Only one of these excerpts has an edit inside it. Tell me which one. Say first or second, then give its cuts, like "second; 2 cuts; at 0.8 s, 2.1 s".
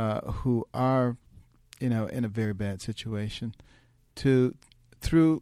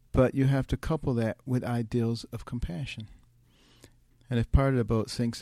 second; 1 cut; at 4.1 s